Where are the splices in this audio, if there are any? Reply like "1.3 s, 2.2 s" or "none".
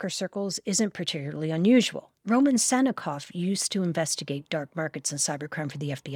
2.2 s